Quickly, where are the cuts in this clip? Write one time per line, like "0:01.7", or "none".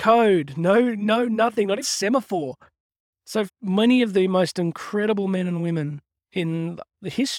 0:01.8
0:03.5